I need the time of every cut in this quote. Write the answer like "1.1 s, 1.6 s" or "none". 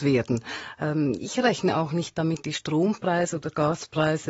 1.2 s, 2.4 s